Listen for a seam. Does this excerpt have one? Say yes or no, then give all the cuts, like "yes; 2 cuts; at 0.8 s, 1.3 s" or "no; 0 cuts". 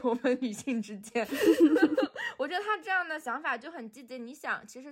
no; 0 cuts